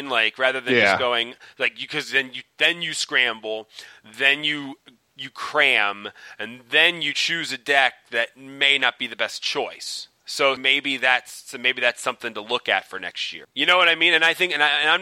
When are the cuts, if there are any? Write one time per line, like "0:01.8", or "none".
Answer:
0:10.6
0:13.4